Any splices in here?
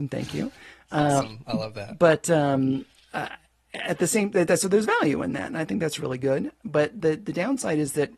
no; 0 cuts

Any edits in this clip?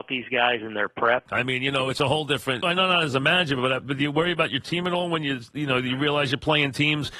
yes; 2 cuts; at 1.3 s, 2.6 s

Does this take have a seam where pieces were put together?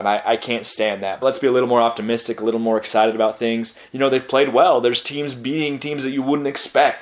yes; 2 cuts; at 1.2 s, 3.8 s

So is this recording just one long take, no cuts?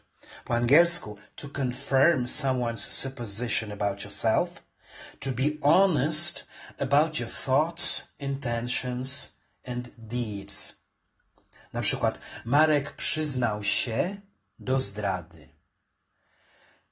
yes; 0 cuts

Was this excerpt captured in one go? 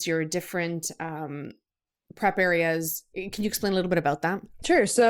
yes; 0 cuts

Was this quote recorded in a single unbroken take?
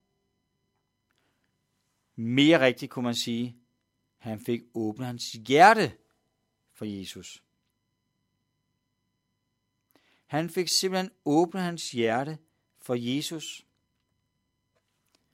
yes; 0 cuts

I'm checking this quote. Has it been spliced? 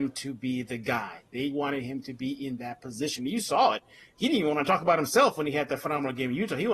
no; 0 cuts

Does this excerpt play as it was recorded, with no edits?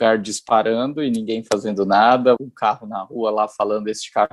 no; 1 cut; at 2.4 s

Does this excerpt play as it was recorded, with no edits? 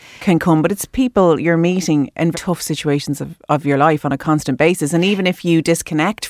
no; 1 cut; at 2.3 s

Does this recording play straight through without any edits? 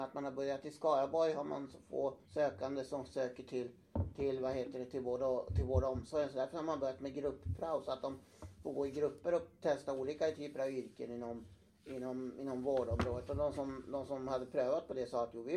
no; 1 cut; at 2.2 s

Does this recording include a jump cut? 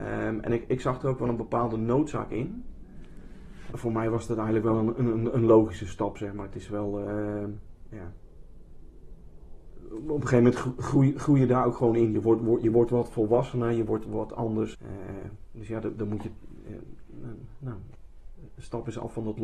yes; 2 cuts; at 3.7 s, 14.7 s

